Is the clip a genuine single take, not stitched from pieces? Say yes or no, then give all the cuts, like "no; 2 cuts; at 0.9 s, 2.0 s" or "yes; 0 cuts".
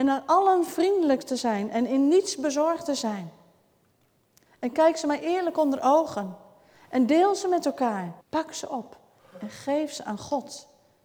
no; 2 cuts; at 4.5 s, 8.2 s